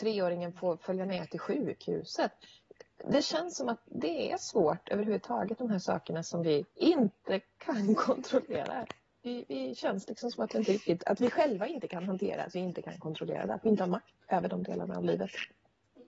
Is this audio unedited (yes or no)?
no